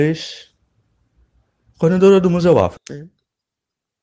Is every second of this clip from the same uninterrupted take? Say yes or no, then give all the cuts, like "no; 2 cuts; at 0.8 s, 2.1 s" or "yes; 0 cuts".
no; 1 cut; at 2.8 s